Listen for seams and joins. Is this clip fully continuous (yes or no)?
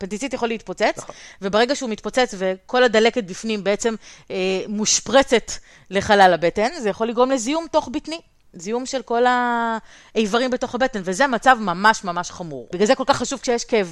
yes